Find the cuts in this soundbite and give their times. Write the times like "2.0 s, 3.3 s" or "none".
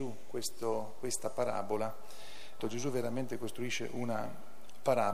2.6 s

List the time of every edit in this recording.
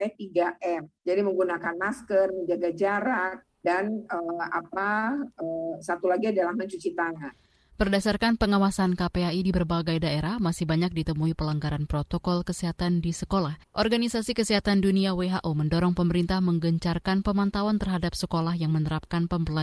1.0 s, 3.5 s, 13.6 s

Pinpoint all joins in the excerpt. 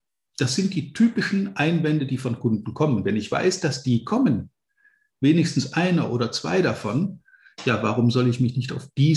none

